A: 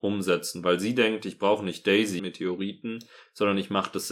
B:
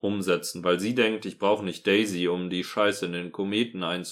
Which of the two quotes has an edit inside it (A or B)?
A